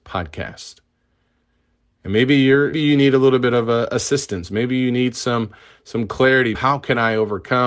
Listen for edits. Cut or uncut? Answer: cut